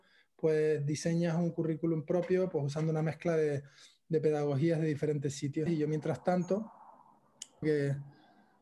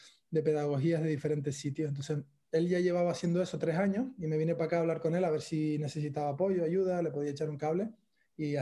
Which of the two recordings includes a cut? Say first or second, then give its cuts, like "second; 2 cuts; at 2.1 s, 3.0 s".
first; 2 cuts; at 5.7 s, 7.6 s